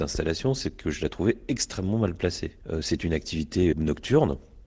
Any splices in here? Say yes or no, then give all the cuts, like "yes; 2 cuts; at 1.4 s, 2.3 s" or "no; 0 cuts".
yes; 2 cuts; at 2.6 s, 3.7 s